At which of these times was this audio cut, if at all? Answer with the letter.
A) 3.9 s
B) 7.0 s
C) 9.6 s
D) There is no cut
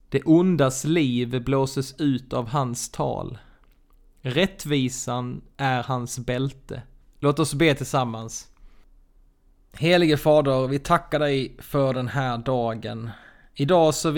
B